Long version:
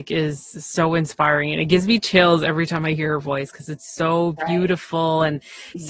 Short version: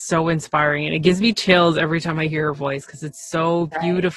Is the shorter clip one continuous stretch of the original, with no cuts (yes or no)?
yes